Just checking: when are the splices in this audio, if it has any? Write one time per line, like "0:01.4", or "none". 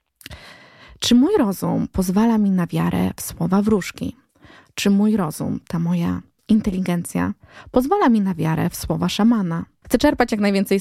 0:09.8